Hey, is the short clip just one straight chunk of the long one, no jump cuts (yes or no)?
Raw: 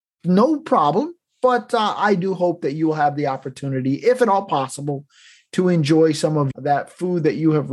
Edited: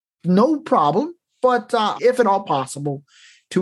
no